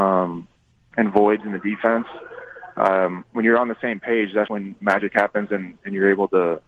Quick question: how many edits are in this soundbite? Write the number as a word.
one